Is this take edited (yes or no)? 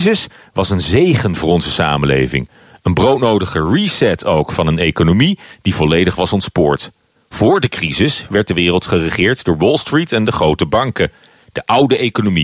no